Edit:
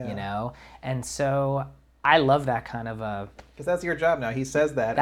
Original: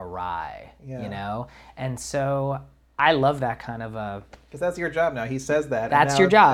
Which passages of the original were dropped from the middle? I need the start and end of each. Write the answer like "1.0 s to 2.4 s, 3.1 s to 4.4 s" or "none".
none